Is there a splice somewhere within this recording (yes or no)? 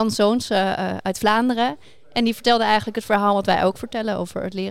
no